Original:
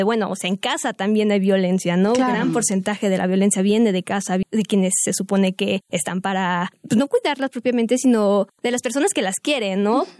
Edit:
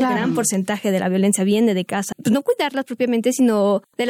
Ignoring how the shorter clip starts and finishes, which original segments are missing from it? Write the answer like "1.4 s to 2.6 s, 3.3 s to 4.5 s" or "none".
4.3 s to 6.8 s